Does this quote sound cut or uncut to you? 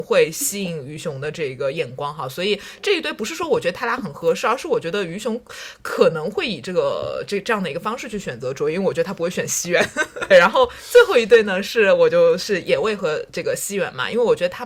cut